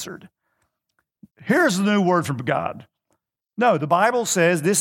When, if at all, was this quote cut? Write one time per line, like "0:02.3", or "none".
0:01.3